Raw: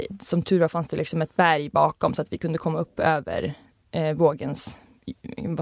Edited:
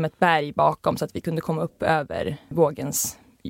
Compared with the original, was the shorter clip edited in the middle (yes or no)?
yes